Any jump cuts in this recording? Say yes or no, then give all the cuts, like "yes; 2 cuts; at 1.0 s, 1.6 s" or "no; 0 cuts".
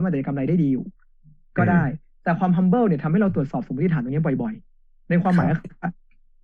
no; 0 cuts